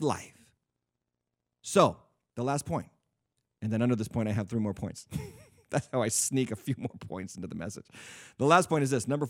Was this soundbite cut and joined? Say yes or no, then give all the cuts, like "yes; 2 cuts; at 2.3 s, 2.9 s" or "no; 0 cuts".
no; 0 cuts